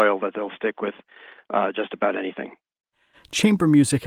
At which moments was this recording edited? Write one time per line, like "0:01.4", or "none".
none

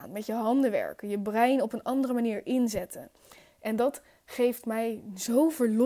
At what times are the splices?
none

